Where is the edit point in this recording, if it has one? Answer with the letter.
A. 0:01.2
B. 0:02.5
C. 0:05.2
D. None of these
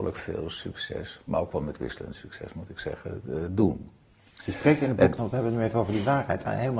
C